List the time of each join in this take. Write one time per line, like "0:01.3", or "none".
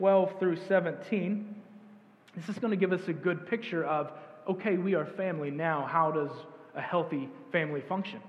none